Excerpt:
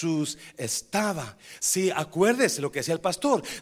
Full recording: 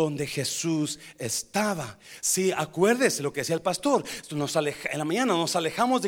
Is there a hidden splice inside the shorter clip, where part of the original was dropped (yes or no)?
no